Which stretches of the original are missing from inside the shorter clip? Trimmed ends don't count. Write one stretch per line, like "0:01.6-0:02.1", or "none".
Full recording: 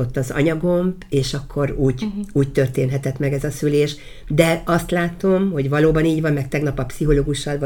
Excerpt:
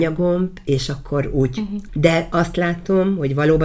0:02.3-0:04.2